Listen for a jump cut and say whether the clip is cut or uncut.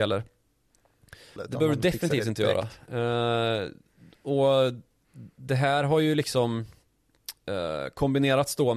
cut